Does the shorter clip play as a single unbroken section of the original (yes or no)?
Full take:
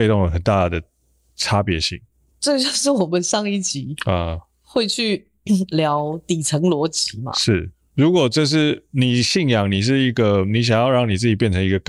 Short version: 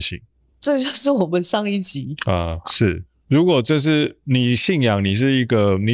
no